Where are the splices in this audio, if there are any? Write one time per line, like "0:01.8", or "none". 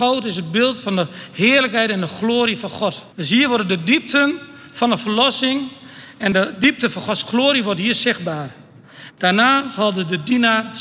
0:03.1
0:09.1